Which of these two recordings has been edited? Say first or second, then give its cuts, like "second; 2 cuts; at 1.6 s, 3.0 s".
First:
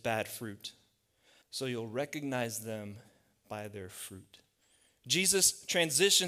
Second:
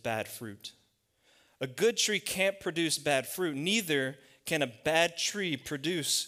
first; 1 cut; at 1.4 s